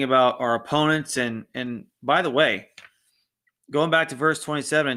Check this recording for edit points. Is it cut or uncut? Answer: uncut